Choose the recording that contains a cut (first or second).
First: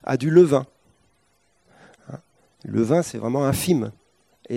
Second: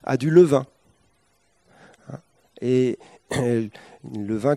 second